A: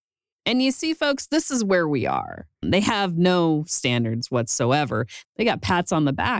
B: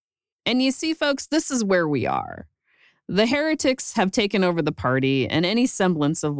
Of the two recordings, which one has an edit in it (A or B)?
A